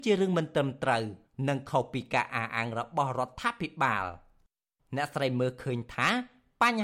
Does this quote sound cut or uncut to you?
uncut